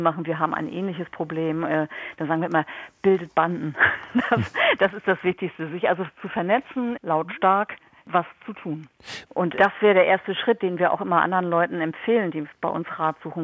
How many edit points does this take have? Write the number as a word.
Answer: two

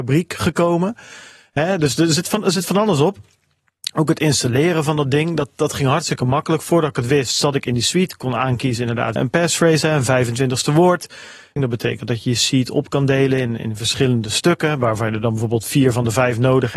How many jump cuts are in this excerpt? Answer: two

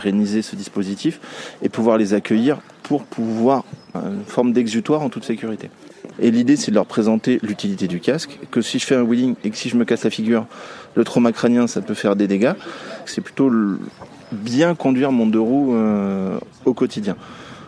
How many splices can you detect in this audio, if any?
three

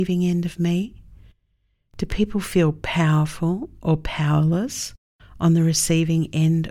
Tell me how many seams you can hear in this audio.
zero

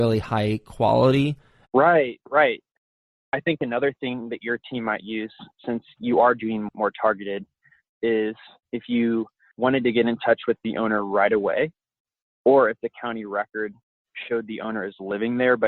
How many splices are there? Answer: one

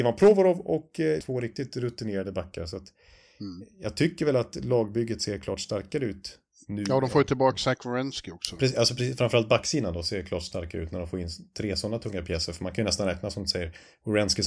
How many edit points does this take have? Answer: one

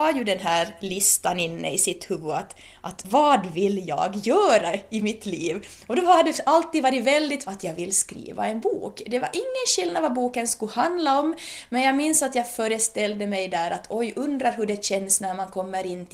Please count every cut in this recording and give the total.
one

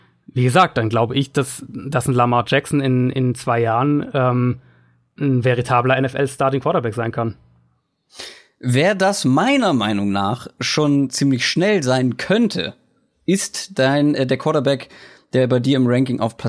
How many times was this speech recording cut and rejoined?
zero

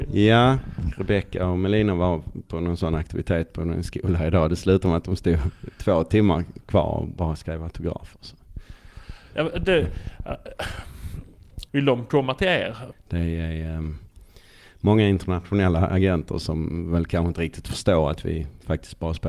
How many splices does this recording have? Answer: two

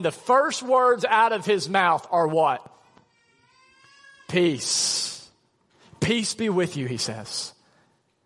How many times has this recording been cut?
zero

